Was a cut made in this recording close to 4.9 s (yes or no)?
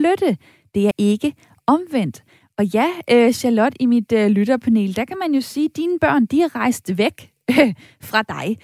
no